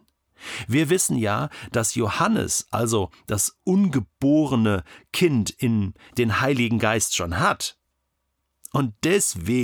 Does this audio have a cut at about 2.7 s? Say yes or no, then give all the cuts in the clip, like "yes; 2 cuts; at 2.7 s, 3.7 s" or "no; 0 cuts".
no; 1 cut; at 6.1 s